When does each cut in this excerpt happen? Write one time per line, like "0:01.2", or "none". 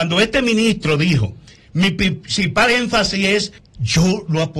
0:03.6

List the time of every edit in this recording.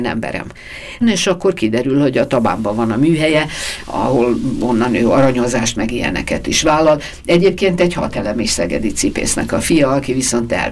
0:01.0
0:05.7

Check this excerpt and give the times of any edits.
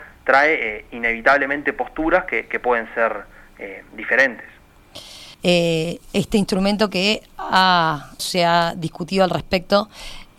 0:05.3
0:08.2

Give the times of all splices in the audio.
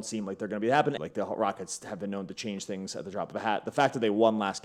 0:01.0

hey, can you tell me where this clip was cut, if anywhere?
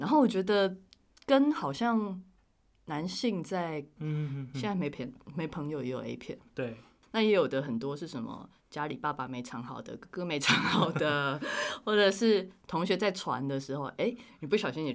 0:04.0
0:07.0

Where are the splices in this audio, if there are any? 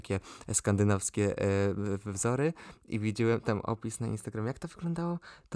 none

